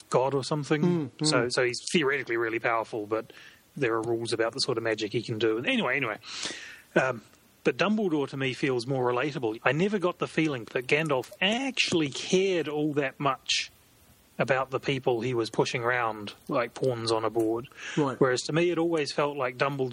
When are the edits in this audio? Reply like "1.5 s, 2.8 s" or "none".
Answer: 9.5 s, 10.7 s